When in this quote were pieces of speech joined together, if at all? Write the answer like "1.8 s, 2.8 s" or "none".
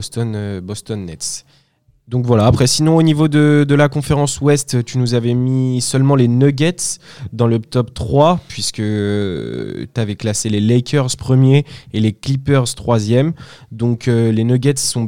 none